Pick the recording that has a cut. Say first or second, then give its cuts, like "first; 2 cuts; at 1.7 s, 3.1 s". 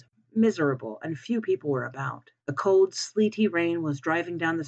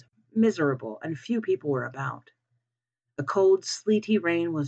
first; 1 cut; at 2.4 s